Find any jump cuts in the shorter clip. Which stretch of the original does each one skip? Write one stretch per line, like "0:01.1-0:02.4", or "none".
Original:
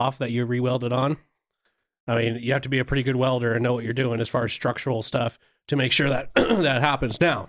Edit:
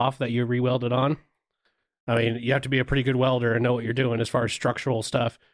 none